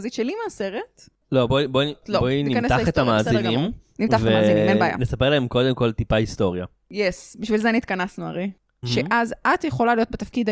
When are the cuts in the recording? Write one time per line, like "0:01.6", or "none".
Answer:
0:01.5
0:08.8